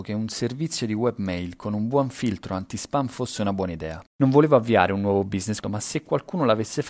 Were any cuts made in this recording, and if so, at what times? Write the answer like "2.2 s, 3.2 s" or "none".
4.1 s, 5.6 s

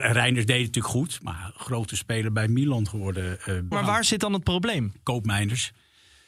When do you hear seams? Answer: 3.7 s

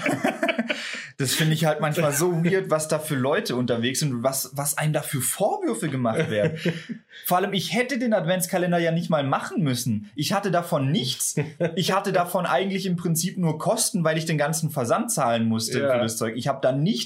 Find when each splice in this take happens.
none

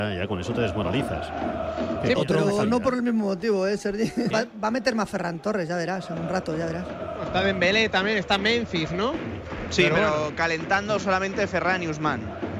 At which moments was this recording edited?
2.2 s, 4.3 s

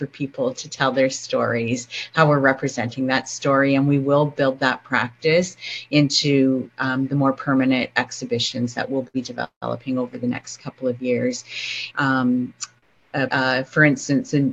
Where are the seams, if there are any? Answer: 11.9 s, 13.3 s

